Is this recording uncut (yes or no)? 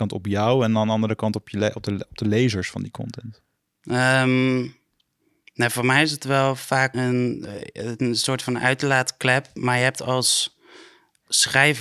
no